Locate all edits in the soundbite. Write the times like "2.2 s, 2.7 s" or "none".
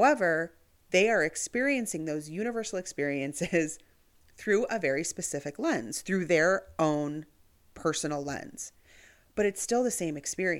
none